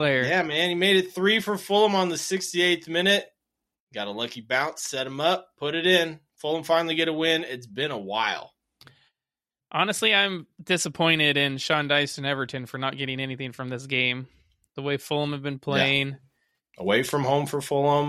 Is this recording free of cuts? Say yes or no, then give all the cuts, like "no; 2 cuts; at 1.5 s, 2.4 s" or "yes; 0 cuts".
yes; 0 cuts